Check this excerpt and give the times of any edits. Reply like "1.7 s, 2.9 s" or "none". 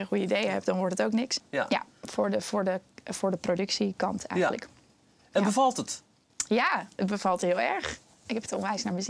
1.4 s